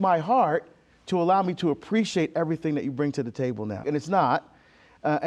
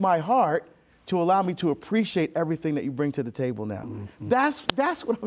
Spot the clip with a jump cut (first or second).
first